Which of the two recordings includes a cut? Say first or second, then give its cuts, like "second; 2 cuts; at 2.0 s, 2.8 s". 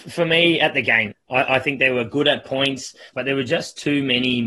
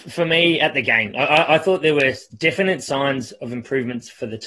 first; 2 cuts; at 1.1 s, 3.1 s